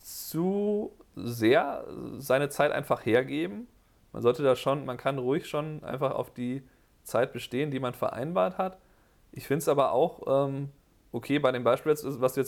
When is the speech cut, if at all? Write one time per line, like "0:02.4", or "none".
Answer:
none